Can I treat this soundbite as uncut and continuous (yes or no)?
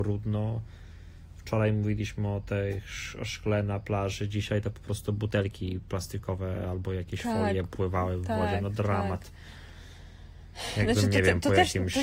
yes